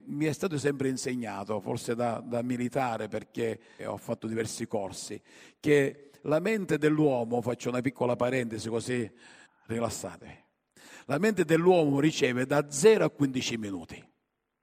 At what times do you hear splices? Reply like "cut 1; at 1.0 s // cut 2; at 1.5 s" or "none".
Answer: cut 1; at 3.8 s // cut 2; at 9.5 s